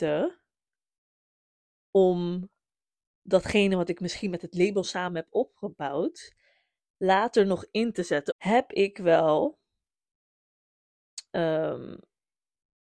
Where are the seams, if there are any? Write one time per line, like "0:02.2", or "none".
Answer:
0:08.3